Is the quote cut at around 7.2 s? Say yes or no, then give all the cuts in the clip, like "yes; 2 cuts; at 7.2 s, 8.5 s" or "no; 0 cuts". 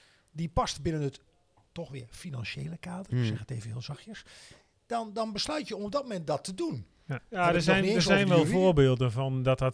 yes; 1 cut; at 7.2 s